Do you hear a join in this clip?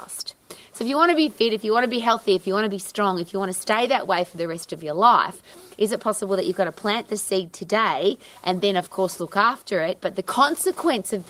no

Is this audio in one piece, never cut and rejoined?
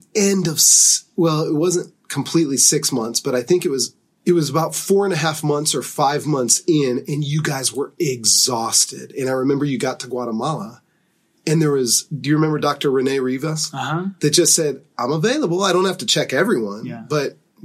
yes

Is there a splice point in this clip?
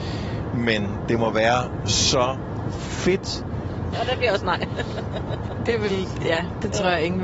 yes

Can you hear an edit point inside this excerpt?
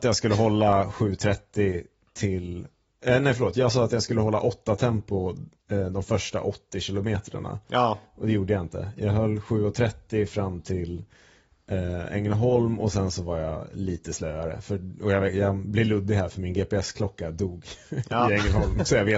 no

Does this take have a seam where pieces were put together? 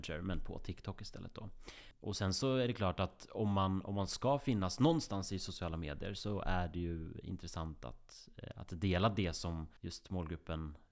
yes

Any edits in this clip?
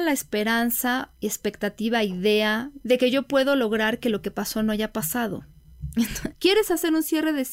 yes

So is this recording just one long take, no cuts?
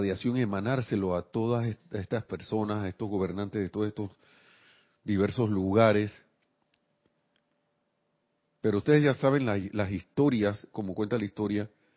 yes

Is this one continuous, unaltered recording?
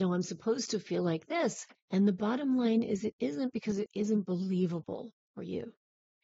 no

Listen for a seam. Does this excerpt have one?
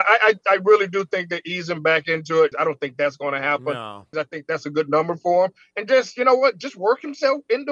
yes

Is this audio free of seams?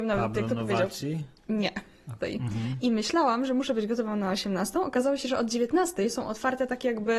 no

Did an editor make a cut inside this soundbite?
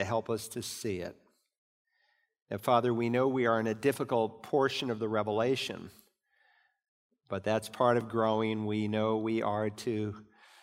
no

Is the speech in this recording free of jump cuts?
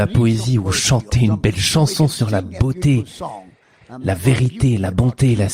yes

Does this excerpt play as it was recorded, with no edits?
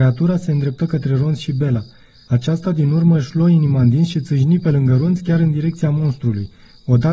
yes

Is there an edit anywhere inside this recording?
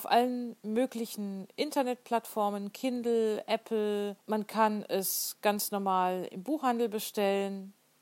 yes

